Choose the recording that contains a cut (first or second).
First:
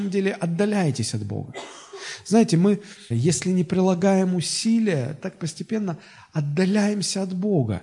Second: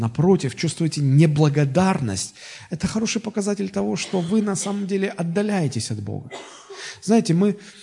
first